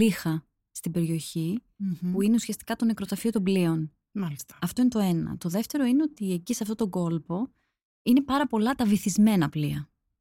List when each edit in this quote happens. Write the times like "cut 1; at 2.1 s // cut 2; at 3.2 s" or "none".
none